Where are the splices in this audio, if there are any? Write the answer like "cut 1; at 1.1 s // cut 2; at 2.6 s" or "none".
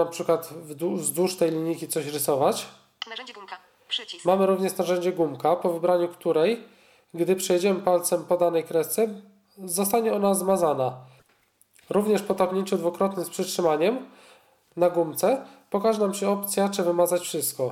none